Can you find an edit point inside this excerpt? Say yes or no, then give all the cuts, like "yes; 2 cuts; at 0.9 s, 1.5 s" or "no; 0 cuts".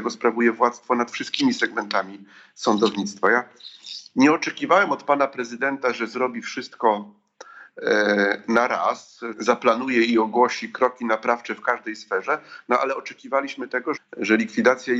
yes; 2 cuts; at 9.3 s, 14.0 s